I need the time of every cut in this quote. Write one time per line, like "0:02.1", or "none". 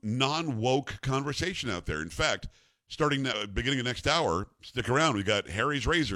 none